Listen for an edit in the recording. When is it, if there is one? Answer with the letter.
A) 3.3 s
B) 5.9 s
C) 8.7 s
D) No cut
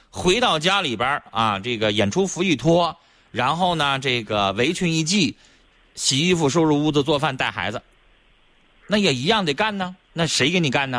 D